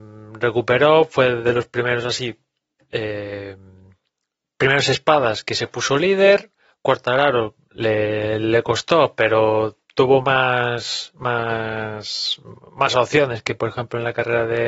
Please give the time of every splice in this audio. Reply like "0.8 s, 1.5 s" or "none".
none